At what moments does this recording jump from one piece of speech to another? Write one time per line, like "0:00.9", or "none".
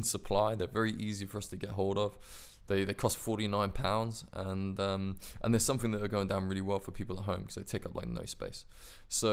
none